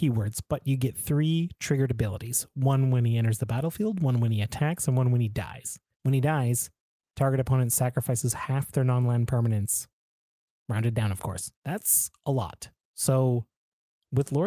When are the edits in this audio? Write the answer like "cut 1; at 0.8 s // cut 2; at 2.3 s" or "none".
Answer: cut 1; at 5.9 s // cut 2; at 11.6 s